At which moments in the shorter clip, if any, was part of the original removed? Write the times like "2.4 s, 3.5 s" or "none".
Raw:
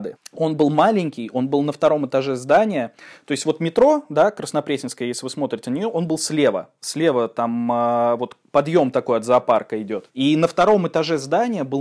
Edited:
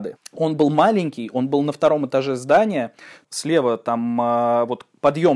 3.2 s